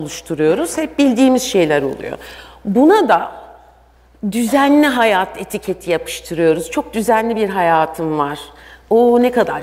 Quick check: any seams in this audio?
no; 0 cuts

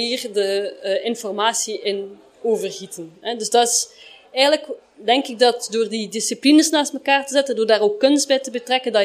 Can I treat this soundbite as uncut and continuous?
yes; 0 cuts

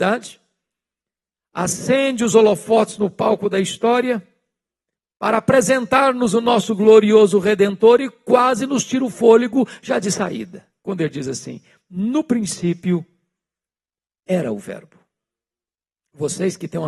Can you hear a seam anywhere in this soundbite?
no; 0 cuts

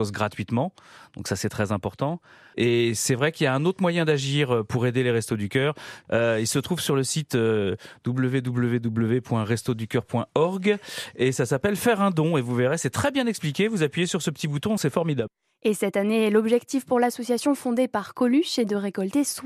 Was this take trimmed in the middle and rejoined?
yes; 1 cut; at 14.8 s

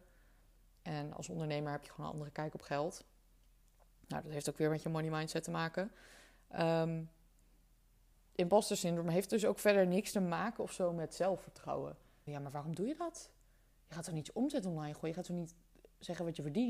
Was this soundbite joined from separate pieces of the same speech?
yes; 2 cuts; at 8.1 s, 12.3 s

